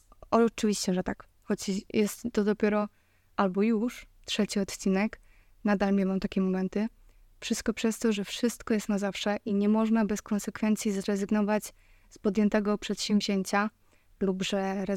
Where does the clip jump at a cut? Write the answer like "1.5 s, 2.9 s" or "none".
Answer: 8.1 s